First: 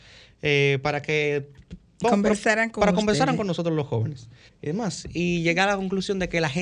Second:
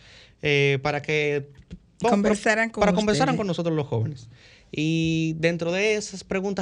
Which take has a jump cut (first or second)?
first